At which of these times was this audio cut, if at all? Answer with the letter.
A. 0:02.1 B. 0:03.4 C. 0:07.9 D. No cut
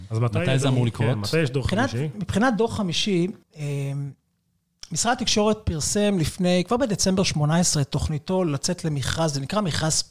B